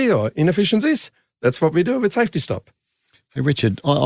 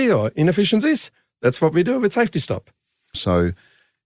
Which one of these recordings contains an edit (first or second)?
second